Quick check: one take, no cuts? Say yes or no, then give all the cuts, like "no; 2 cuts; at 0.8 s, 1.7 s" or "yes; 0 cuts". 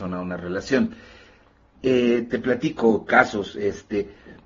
no; 1 cut; at 1.7 s